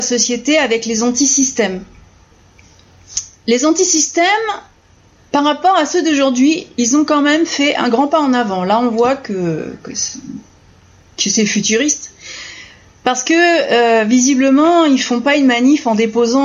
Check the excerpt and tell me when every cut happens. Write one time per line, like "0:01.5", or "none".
none